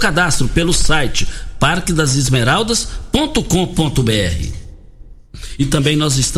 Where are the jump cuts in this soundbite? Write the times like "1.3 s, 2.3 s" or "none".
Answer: none